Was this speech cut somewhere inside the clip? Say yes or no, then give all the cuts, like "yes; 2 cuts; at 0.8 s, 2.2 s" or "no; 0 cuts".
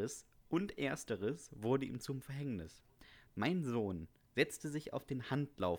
no; 0 cuts